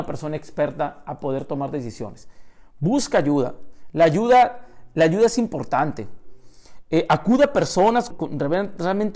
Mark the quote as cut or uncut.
cut